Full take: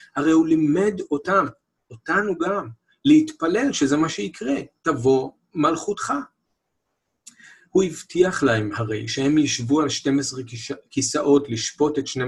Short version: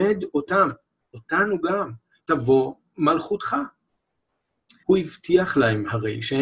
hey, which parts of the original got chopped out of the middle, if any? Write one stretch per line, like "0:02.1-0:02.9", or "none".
0:02.9-0:04.7
0:07.4-0:07.7